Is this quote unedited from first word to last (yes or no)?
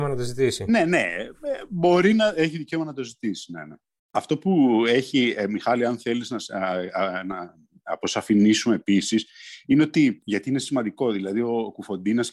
yes